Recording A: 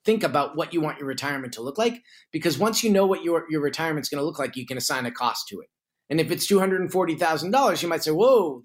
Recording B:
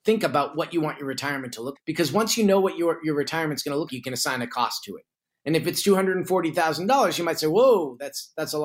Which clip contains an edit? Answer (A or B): B